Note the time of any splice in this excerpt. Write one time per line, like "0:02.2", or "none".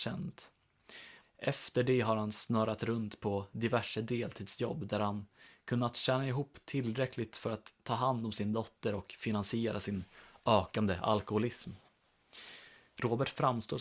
0:01.2